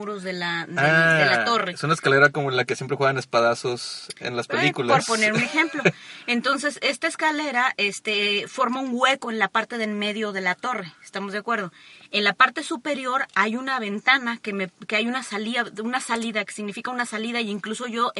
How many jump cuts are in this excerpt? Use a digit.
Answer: 0